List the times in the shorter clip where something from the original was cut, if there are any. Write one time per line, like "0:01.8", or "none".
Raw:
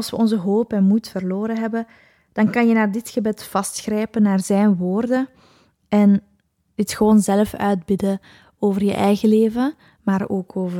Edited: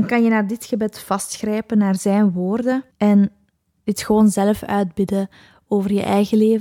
0:02.9